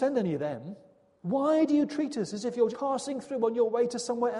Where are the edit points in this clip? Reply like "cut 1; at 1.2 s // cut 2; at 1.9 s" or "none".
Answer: cut 1; at 1.2 s // cut 2; at 2.7 s